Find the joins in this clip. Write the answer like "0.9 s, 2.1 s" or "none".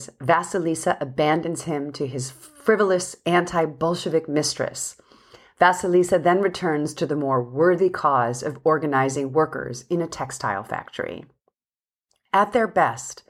none

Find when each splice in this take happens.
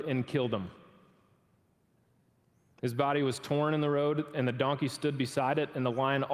none

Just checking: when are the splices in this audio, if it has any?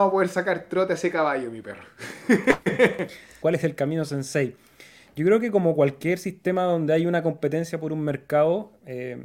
3.4 s

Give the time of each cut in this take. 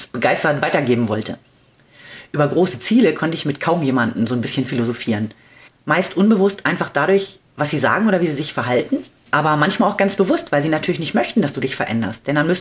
5.7 s

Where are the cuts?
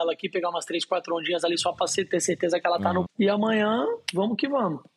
3.1 s

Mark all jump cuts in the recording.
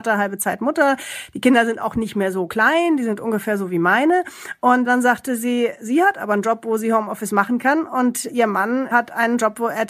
none

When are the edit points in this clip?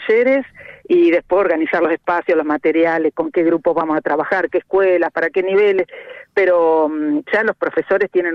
none

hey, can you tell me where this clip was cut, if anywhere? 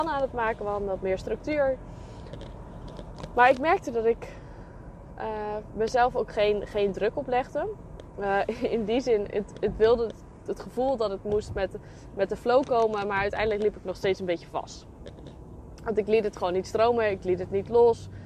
none

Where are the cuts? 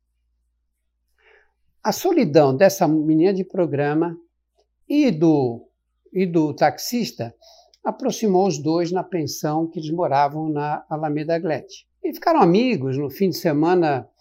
11.9 s

